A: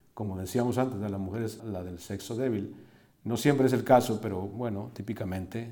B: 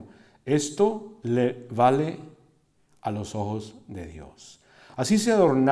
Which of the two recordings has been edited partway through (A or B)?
A